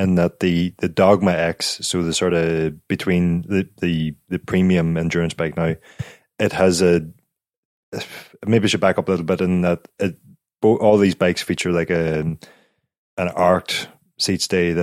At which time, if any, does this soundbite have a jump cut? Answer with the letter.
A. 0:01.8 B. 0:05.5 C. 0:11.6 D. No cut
D